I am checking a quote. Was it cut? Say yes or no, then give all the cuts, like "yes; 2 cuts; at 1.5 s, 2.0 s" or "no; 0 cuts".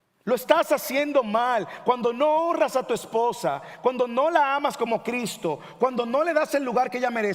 no; 0 cuts